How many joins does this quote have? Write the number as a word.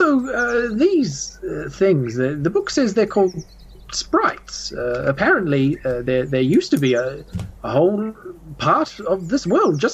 one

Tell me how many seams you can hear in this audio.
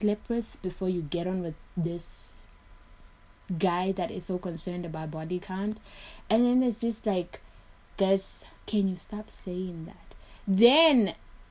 one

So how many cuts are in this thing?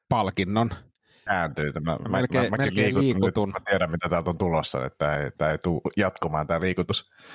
one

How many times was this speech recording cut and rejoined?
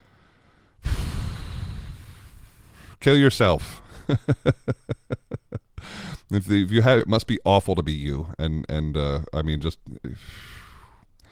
one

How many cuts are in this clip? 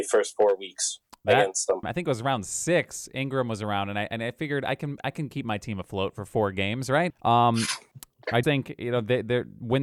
three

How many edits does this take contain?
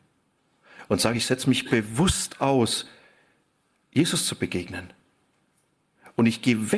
zero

